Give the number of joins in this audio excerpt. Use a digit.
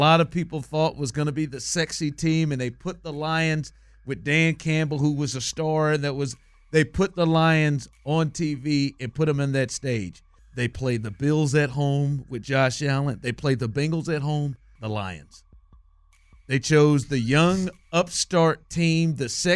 2